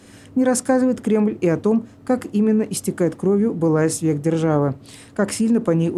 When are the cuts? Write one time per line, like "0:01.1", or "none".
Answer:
none